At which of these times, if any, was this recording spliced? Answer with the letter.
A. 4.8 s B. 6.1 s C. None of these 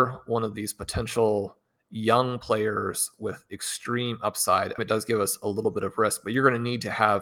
A